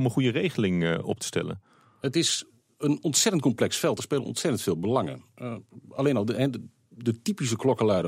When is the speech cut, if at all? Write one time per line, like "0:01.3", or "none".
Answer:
none